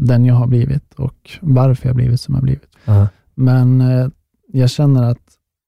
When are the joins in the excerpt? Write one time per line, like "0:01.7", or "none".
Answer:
0:02.8